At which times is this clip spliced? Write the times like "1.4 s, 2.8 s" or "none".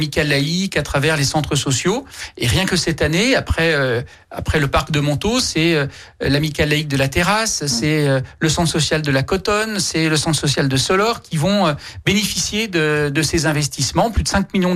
none